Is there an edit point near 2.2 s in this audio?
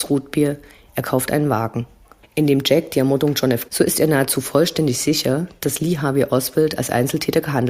yes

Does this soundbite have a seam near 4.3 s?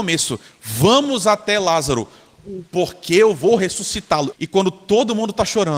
yes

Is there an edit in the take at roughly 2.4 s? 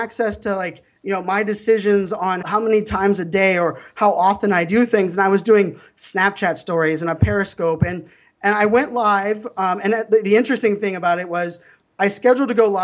yes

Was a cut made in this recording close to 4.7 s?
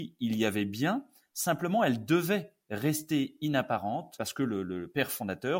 no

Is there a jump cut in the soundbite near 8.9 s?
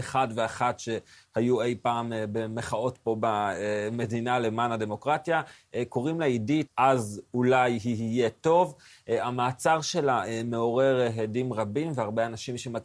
no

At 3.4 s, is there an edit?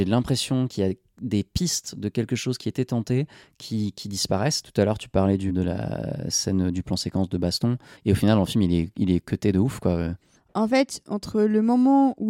no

